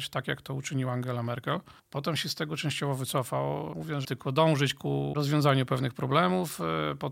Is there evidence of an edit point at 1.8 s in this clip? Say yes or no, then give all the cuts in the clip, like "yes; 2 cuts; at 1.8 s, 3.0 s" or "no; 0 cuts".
yes; 2 cuts; at 1.8 s, 4.0 s